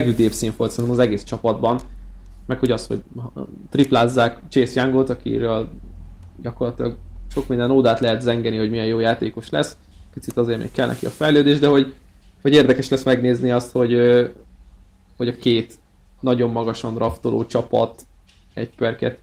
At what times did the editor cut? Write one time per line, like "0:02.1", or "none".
none